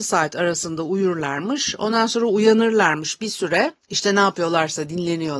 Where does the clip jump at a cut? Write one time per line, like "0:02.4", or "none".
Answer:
0:03.8